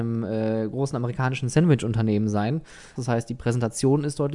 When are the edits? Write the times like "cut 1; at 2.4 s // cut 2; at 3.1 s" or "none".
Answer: cut 1; at 3.0 s